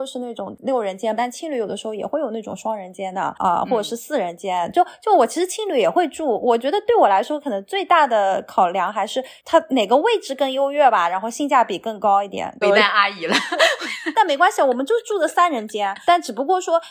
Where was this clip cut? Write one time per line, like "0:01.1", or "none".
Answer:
0:01.2
0:12.6